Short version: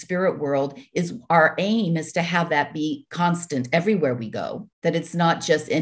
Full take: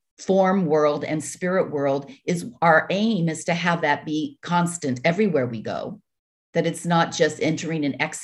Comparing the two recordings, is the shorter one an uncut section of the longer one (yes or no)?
no